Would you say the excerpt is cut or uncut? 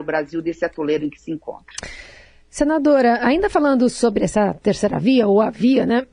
uncut